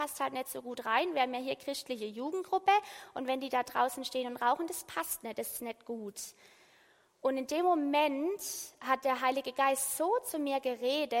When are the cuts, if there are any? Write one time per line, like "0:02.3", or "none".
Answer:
none